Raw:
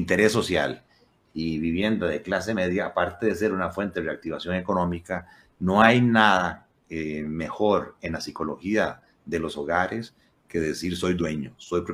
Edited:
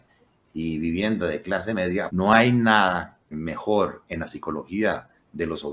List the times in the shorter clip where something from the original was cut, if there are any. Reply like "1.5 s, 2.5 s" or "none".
2.1 s, 3.3 s